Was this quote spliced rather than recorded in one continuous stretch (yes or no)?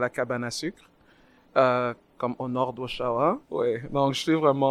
yes